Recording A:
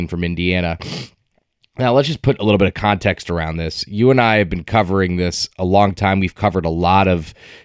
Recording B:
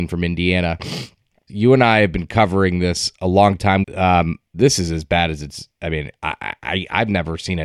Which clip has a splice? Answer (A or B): B